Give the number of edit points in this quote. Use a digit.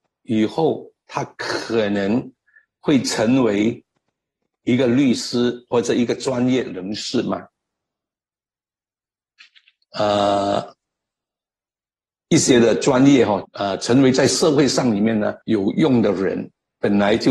3